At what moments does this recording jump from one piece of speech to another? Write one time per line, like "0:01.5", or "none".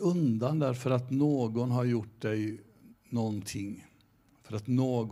none